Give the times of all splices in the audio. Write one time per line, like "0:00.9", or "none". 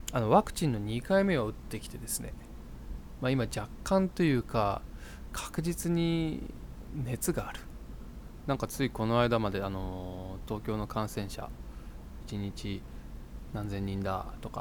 0:08.4